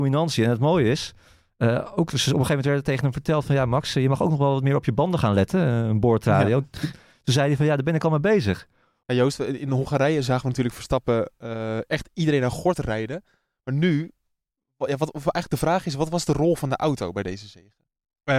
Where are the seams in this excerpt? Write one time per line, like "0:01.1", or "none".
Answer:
0:09.0